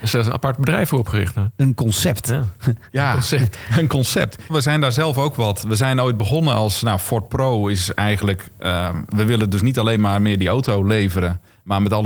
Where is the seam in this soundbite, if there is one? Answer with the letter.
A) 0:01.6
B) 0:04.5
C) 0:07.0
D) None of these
B